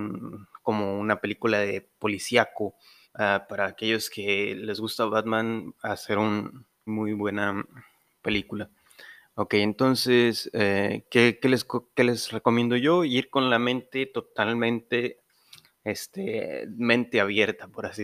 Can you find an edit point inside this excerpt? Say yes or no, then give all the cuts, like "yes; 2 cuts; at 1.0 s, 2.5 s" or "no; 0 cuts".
yes; 2 cuts; at 3.0 s, 6.9 s